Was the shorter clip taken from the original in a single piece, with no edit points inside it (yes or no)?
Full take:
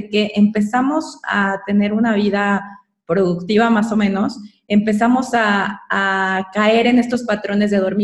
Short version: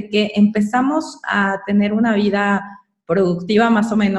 yes